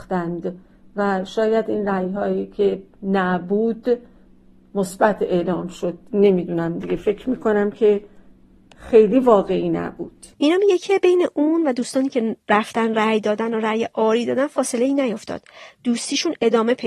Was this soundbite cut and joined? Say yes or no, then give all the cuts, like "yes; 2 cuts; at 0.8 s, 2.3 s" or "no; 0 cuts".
yes; 1 cut; at 10.3 s